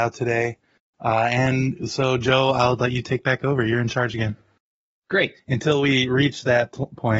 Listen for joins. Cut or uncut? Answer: cut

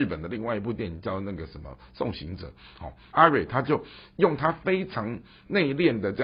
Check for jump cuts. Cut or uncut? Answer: cut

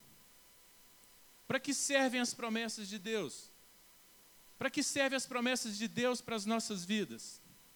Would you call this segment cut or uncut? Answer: cut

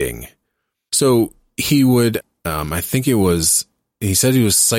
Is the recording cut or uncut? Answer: cut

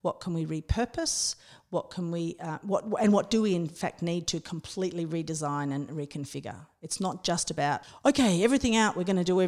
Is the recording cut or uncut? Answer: uncut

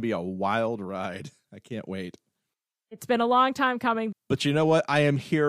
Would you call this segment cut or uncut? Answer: cut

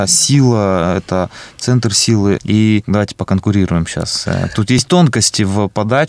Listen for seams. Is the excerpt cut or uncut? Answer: cut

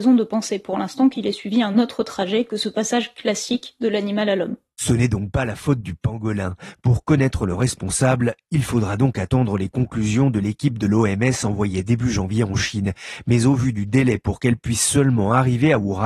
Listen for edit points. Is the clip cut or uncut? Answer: uncut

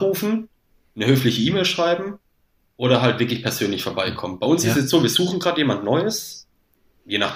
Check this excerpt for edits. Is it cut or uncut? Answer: uncut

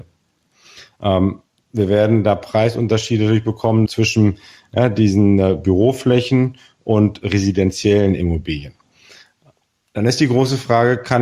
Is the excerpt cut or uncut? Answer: cut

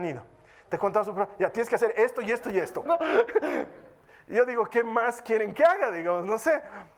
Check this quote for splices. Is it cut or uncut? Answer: cut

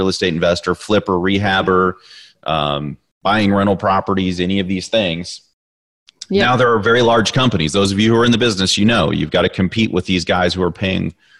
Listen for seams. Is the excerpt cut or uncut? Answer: uncut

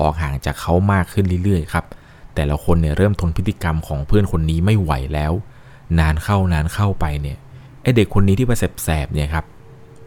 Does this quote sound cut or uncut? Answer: uncut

